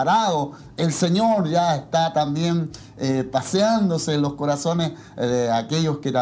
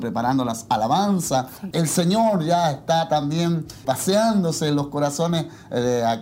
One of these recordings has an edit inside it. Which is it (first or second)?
second